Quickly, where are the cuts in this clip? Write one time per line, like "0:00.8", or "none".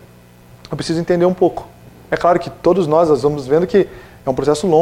none